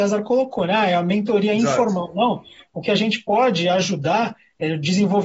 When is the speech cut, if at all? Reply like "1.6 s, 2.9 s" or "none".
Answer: none